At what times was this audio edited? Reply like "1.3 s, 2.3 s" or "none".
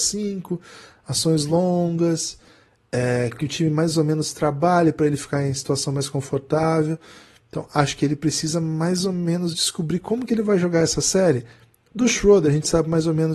none